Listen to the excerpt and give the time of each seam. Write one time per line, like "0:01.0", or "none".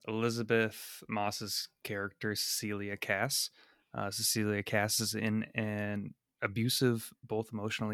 none